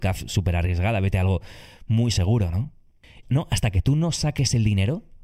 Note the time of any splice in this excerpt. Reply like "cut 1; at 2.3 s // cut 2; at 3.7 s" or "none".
cut 1; at 3.2 s